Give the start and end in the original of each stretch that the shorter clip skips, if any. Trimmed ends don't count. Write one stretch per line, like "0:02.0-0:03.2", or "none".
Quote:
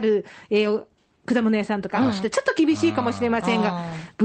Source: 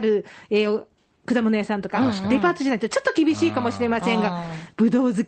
0:02.2-0:02.8